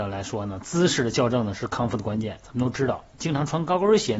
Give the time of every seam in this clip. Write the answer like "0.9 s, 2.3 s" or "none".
2.4 s